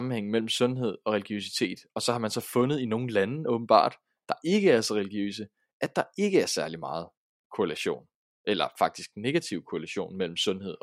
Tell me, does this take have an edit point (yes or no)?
no